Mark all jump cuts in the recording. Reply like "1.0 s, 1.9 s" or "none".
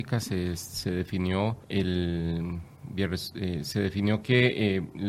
1.6 s